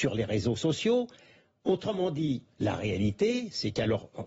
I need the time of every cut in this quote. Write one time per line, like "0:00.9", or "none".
0:02.5